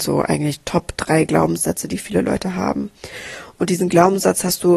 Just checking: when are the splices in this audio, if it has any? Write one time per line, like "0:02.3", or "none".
none